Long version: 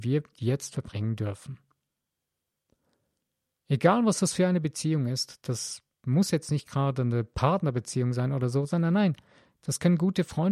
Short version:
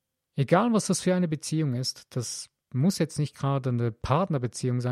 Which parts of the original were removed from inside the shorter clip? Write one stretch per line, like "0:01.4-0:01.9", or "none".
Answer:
none